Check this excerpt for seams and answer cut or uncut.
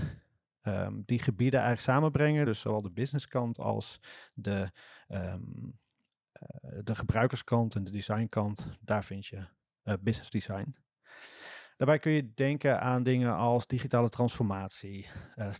uncut